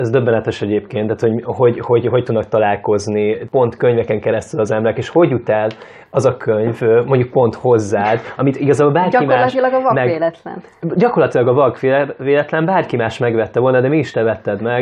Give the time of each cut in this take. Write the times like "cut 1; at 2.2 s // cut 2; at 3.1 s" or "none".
none